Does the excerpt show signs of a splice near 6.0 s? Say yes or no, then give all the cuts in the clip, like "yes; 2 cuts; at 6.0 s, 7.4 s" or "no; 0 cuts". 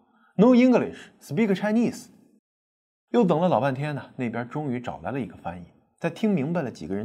no; 0 cuts